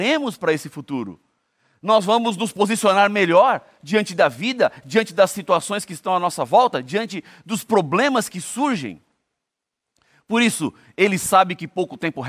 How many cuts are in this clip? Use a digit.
0